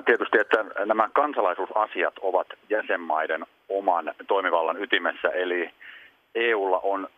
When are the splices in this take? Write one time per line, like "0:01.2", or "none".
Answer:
none